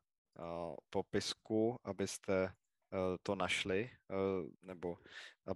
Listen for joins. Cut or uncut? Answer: cut